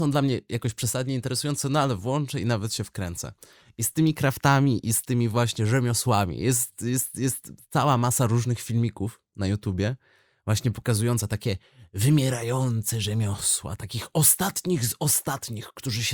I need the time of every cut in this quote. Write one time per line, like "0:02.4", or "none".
none